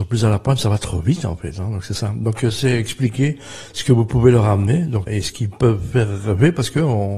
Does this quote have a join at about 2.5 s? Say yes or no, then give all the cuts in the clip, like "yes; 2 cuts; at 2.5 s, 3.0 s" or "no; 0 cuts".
no; 1 cut; at 5.1 s